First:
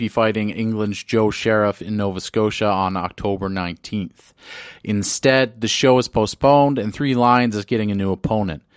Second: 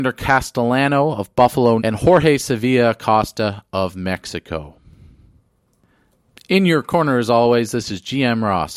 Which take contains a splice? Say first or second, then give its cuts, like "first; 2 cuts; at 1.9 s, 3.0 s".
second; 1 cut; at 1.8 s